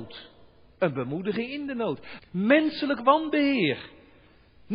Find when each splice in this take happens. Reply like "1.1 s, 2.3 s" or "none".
2.2 s